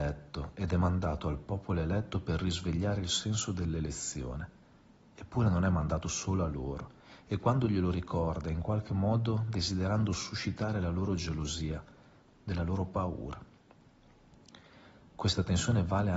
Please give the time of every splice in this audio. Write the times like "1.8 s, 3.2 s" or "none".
12.3 s